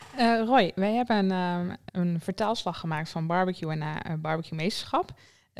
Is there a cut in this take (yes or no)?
yes